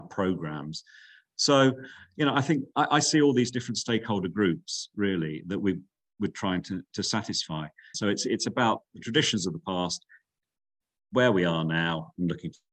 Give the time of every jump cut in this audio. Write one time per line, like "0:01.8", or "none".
0:07.9